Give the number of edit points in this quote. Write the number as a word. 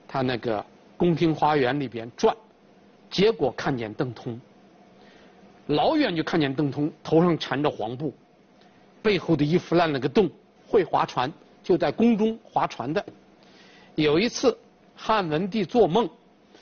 one